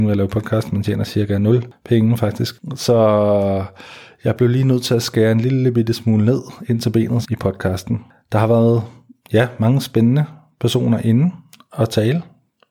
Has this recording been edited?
yes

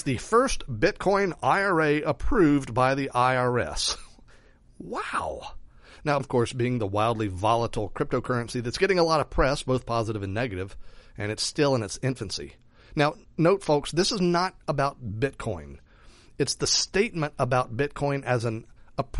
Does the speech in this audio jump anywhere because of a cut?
yes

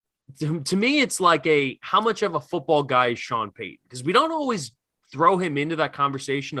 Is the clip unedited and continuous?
yes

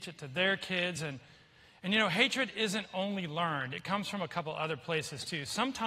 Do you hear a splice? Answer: no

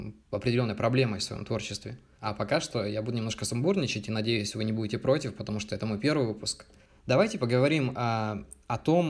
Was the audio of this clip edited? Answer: yes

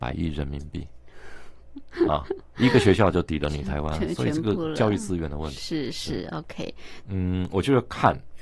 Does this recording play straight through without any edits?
no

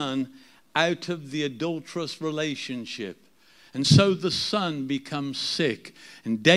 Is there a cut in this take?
no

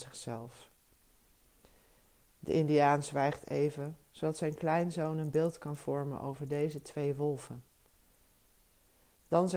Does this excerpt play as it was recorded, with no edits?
yes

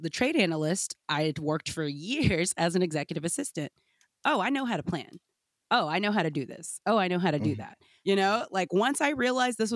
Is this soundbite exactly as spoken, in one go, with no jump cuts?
yes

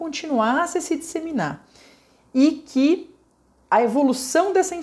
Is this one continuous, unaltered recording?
yes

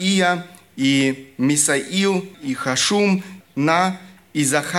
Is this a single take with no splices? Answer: no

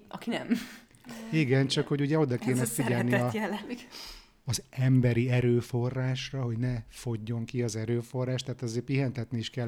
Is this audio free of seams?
yes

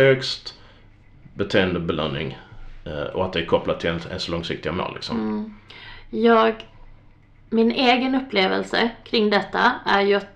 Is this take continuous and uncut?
no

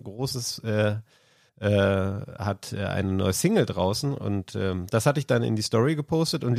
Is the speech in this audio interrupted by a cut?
yes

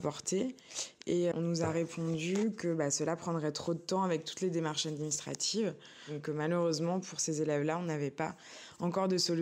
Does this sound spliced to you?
yes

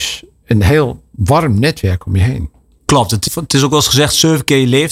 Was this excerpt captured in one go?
no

